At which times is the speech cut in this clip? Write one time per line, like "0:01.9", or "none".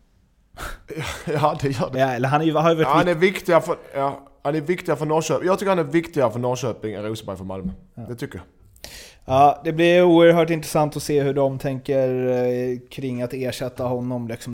0:01.9